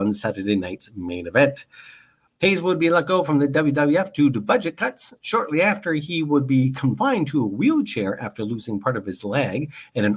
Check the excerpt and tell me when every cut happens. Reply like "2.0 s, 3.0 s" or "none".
2.3 s